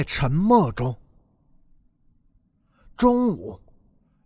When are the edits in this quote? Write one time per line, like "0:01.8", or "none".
none